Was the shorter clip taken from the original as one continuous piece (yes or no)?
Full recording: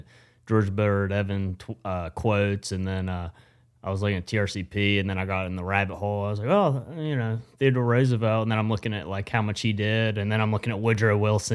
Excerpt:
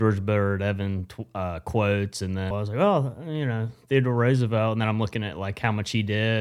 no